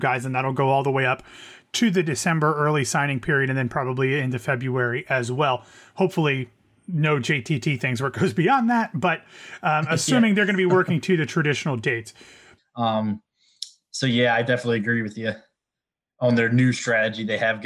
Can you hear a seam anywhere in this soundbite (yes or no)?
yes